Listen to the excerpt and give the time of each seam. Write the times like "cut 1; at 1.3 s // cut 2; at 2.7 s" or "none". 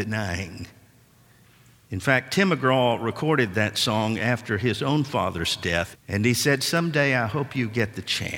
cut 1; at 1.9 s // cut 2; at 5.9 s